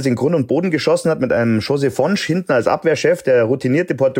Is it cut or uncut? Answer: uncut